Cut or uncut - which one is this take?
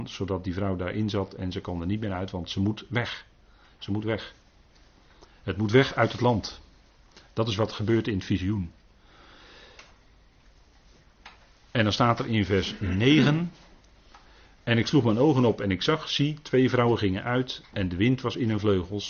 uncut